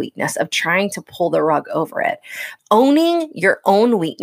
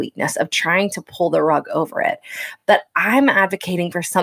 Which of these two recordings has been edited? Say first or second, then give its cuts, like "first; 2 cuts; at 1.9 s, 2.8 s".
first; 1 cut; at 2.6 s